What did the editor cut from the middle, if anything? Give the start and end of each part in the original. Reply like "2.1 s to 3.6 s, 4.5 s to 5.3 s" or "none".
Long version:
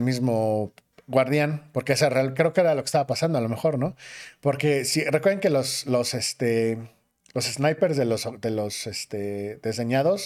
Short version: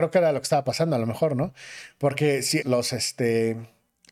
5.0 s to 5.8 s